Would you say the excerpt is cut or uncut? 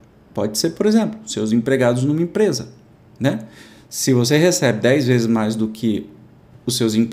uncut